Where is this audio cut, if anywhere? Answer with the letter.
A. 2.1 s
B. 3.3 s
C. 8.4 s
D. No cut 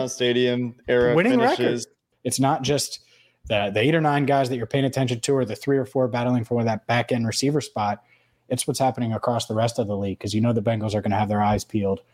A